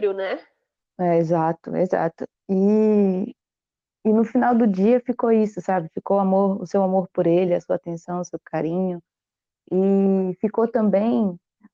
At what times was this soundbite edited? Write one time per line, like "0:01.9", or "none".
none